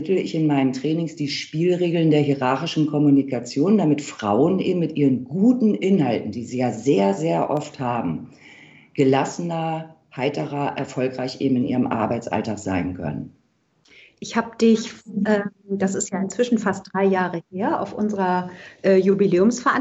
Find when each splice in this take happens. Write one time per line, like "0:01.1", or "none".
none

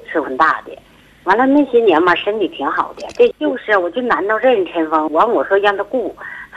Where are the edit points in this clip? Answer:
0:03.3
0:05.1

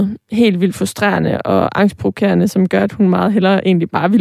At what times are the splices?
none

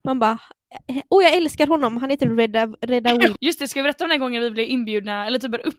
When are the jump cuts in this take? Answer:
0:03.4

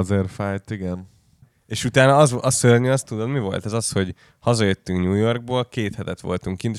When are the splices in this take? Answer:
0:01.4

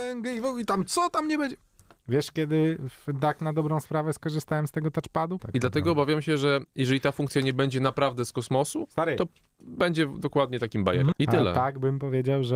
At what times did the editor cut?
0:05.4
0:11.1

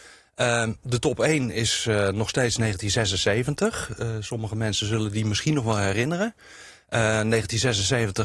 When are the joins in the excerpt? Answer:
none

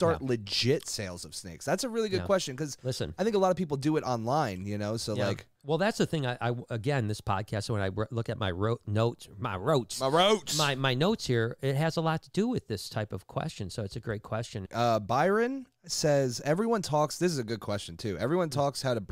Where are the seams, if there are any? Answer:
0:14.7

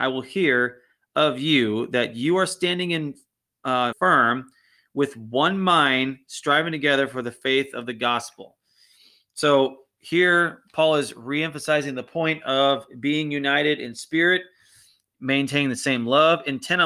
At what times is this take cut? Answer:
0:03.9

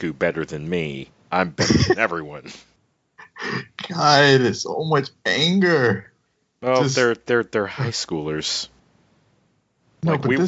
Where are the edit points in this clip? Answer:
none

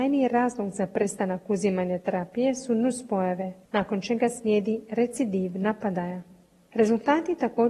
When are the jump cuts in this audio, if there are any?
none

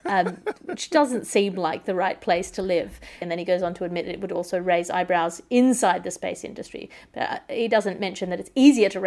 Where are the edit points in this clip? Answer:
0:03.2

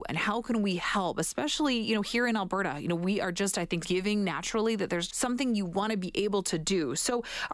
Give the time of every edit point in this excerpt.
0:03.8
0:05.1

